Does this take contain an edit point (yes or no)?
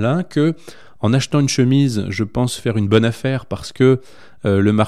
no